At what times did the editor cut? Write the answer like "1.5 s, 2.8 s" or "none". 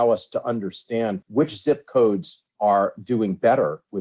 1.2 s